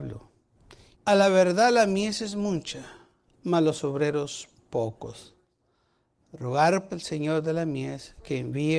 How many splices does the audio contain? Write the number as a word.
two